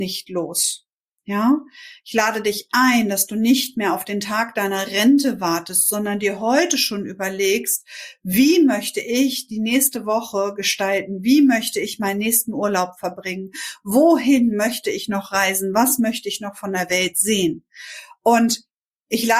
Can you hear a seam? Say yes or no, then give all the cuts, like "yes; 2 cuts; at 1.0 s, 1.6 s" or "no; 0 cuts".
no; 0 cuts